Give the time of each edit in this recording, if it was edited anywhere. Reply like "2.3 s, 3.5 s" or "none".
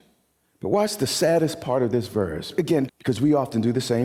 2.9 s

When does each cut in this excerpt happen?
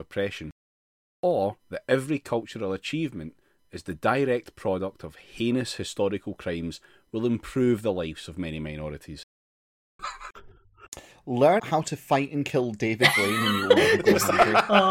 10.0 s, 11.6 s

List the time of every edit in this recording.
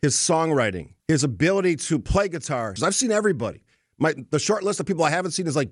1.0 s, 2.8 s

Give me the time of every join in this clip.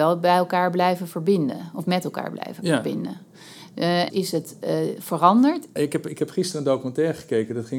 4.1 s, 5.8 s

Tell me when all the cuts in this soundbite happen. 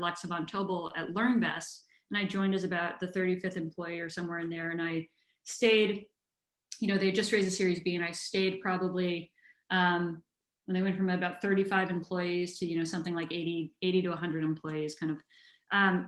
none

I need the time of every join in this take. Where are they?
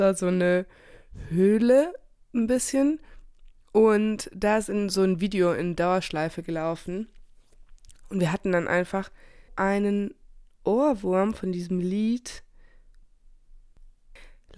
9.5 s

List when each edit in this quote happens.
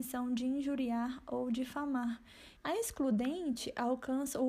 2.6 s

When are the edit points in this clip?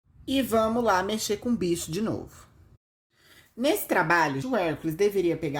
4.4 s

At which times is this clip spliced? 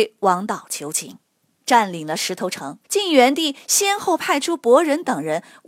1.6 s, 2.8 s

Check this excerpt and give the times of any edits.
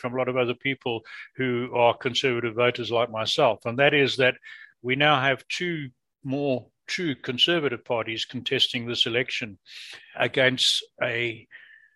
10.1 s

